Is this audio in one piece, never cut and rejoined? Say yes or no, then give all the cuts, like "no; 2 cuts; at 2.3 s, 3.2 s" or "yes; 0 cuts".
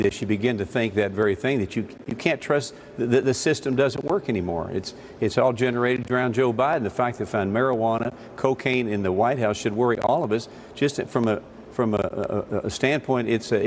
yes; 0 cuts